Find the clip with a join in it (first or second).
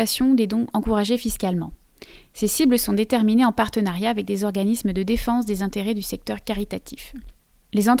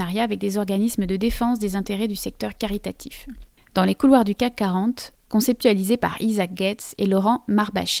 second